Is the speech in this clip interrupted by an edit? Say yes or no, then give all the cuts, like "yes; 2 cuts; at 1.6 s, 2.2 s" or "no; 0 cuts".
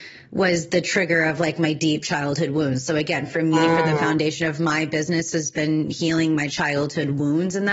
no; 0 cuts